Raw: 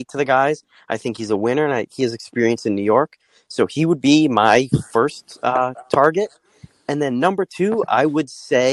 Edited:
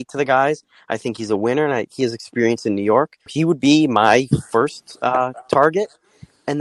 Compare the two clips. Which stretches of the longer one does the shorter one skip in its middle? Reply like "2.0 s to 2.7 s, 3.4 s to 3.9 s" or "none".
3.3 s to 3.7 s